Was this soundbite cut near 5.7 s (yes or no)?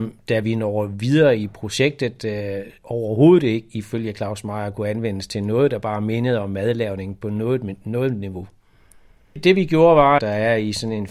no